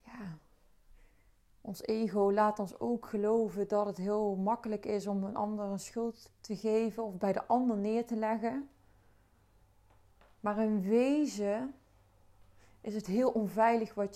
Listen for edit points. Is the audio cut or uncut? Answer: uncut